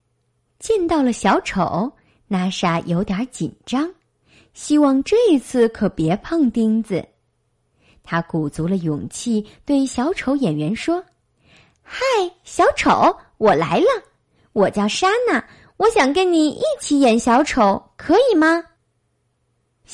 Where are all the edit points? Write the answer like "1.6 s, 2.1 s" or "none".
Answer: none